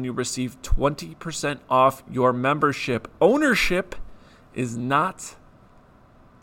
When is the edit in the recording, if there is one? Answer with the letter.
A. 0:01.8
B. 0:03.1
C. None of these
C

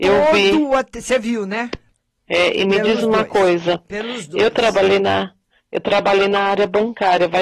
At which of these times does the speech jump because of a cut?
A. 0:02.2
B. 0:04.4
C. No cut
A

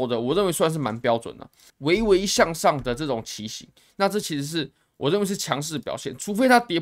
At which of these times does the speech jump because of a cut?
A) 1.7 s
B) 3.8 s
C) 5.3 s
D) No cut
A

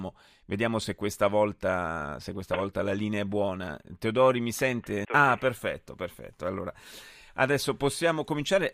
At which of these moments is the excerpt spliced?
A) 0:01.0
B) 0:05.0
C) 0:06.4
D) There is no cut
B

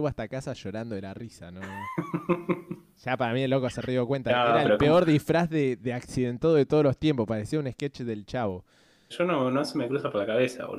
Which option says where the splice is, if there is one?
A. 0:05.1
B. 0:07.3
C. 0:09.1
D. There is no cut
C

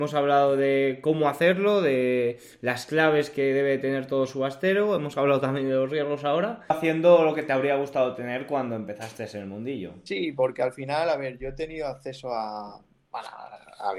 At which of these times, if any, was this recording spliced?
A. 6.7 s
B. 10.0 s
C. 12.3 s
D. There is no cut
A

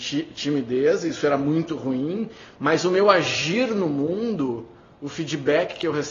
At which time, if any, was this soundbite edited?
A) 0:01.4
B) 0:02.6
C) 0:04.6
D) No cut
D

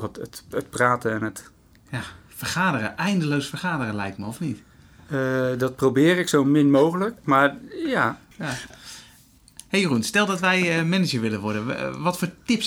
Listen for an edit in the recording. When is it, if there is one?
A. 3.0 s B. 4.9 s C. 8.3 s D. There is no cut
C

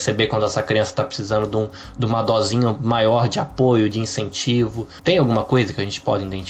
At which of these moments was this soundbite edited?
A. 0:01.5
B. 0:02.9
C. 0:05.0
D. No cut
D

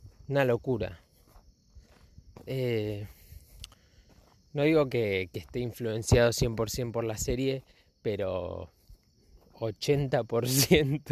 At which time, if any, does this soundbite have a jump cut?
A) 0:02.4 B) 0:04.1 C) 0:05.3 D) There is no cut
D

